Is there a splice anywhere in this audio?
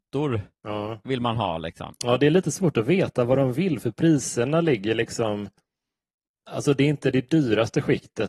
no; 0 cuts

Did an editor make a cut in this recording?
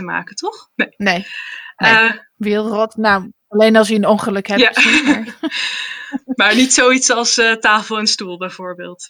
no; 0 cuts

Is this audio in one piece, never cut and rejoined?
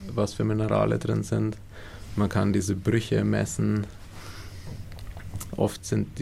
yes; 0 cuts

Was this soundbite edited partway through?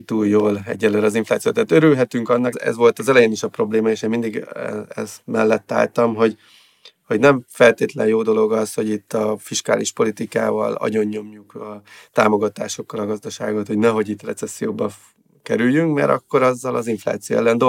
yes; 1 cut; at 2.5 s

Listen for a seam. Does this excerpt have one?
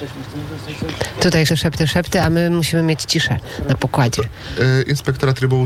yes; 1 cut; at 1.5 s

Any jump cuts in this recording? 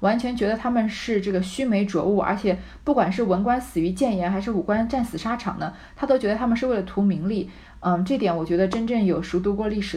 no; 0 cuts

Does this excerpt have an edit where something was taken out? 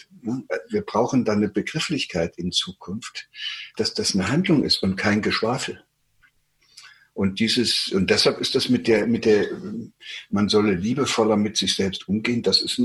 yes; 1 cut; at 3.7 s

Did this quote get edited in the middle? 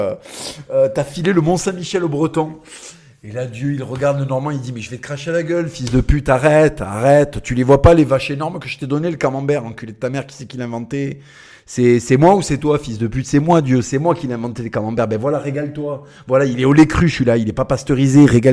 no; 0 cuts

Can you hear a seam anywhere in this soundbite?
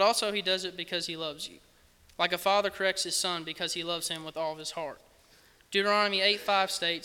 no; 0 cuts

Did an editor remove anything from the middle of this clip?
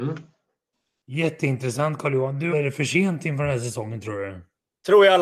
yes; 1 cut; at 2.5 s

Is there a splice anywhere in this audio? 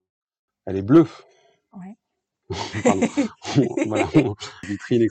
no; 0 cuts

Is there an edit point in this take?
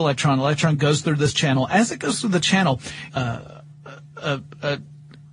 yes; 1 cut; at 3.1 s

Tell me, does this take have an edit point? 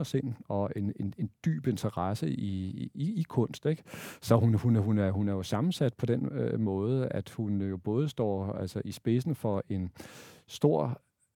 no; 0 cuts

